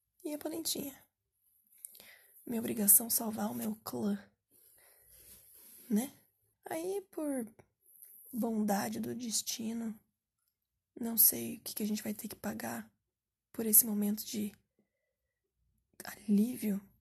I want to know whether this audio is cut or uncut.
cut